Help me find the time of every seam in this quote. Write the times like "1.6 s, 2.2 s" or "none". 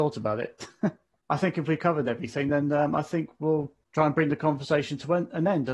none